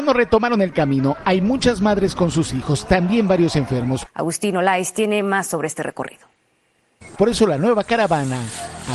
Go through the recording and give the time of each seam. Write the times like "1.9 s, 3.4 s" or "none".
4.1 s, 7.2 s

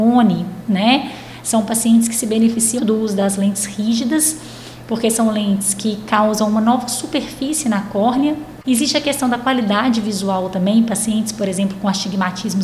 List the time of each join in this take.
2.8 s, 8.6 s

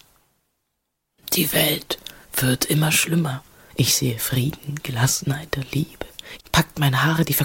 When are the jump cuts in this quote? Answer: 3.7 s, 6.4 s

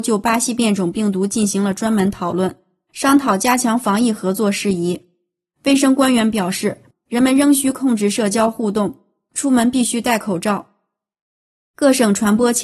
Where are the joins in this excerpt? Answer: 6.9 s

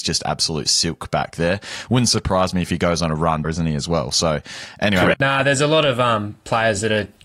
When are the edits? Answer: 3.4 s, 5.1 s

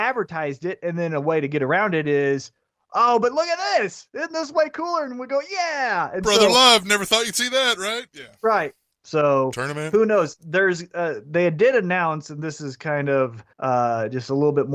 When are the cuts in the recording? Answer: 8.9 s, 13.5 s

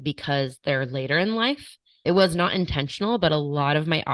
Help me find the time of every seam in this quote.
none

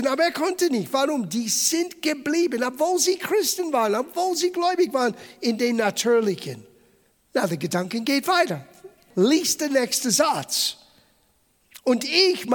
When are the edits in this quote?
7.1 s, 9.1 s

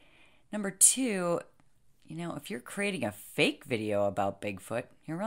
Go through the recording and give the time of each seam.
none

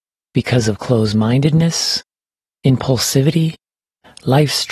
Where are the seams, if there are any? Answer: 2.5 s

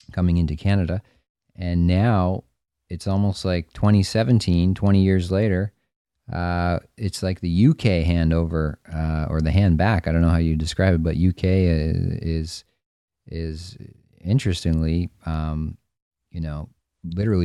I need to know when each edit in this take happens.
none

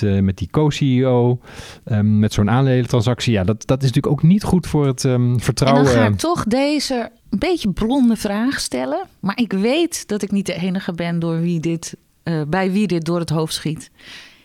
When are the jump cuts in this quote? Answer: 7.2 s

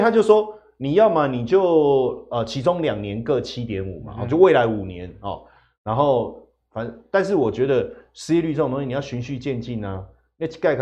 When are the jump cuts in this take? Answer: none

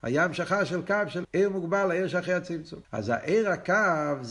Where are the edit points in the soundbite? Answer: 1.2 s, 2.8 s

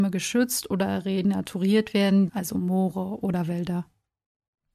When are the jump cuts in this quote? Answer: 2.3 s

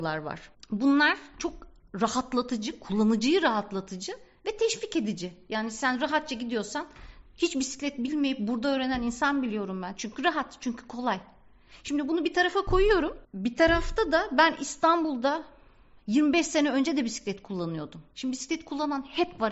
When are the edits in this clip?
none

